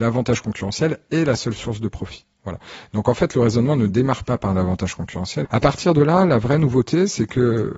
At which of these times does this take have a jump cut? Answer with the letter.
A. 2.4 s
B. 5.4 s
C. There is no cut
B